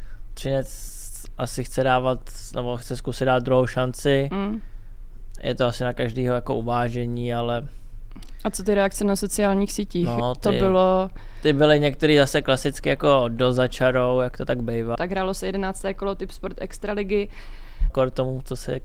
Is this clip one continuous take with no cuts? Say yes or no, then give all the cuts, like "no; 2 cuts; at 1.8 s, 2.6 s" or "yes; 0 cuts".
no; 2 cuts; at 15.0 s, 17.9 s